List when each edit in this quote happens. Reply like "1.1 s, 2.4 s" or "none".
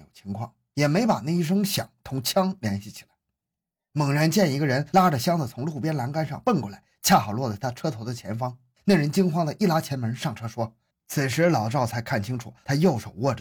10.9 s